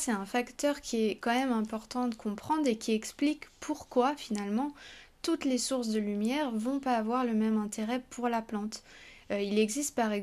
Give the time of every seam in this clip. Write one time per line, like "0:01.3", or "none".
none